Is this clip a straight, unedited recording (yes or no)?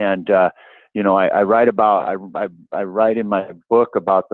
yes